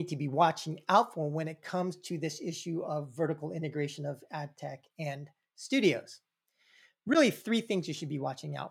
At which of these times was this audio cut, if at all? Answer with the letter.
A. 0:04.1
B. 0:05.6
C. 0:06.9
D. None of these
D